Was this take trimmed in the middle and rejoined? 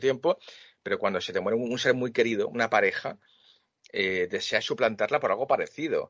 no; 0 cuts

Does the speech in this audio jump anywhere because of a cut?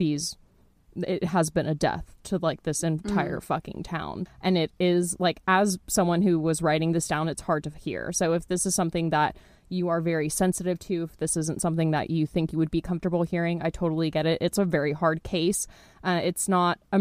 yes; 1 cut; at 4.3 s

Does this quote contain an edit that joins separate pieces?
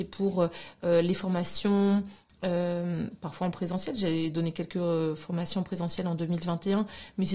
no; 0 cuts

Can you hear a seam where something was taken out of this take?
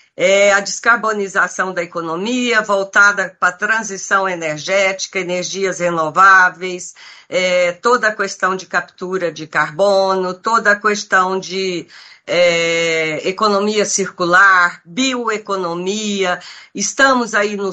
no; 0 cuts

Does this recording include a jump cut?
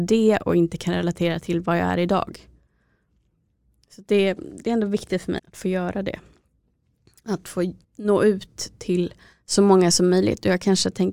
yes; 2 cuts; at 5.4 s, 7.8 s

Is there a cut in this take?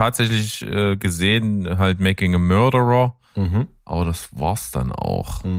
no; 0 cuts

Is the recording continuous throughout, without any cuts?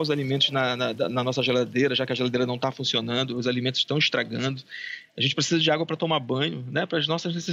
yes; 0 cuts

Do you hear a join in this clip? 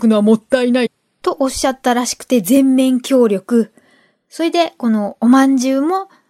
no; 0 cuts

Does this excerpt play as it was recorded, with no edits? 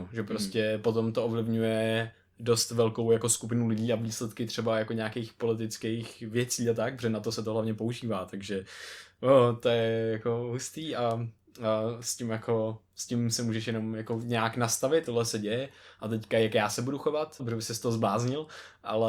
no; 2 cuts; at 15.1 s, 17.4 s

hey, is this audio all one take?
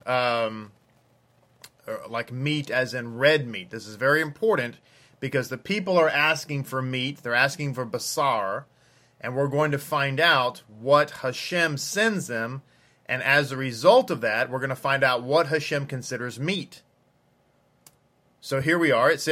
yes; 0 cuts

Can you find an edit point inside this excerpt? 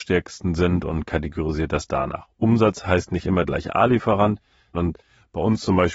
yes; 1 cut; at 4.7 s

